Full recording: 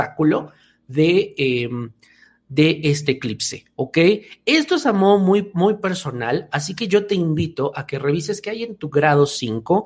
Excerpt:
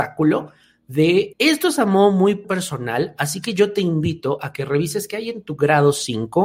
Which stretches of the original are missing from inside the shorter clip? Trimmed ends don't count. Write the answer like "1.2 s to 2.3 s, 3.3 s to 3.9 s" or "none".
1.3 s to 4.4 s, 5.5 s to 5.8 s